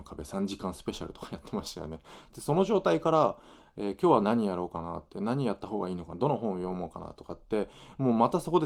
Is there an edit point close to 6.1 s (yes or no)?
yes